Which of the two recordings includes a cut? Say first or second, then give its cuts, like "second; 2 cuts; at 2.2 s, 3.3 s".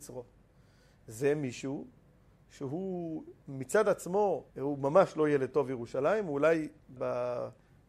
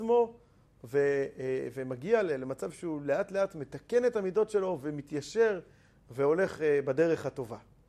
first; 2 cuts; at 4.5 s, 7.0 s